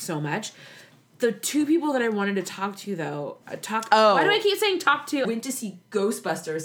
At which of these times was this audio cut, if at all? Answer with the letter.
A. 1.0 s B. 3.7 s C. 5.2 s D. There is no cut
C